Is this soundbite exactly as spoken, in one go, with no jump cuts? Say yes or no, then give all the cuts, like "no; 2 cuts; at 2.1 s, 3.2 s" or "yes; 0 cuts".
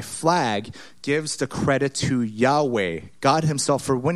yes; 0 cuts